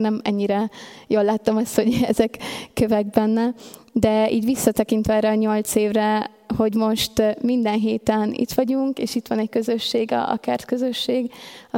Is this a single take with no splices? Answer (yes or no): yes